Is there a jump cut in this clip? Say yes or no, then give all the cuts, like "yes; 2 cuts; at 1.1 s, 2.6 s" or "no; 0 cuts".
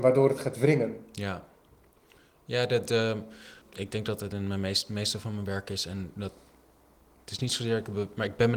no; 0 cuts